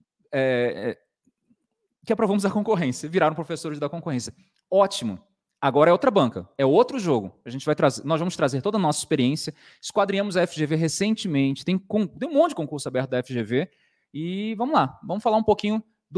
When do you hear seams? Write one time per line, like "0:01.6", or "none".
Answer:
none